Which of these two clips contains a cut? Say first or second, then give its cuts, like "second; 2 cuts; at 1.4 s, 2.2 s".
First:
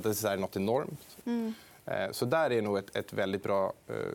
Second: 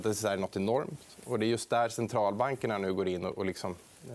first; 1 cut; at 1.2 s